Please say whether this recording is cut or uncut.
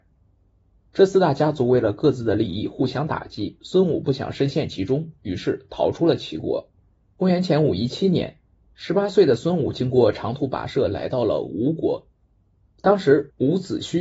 uncut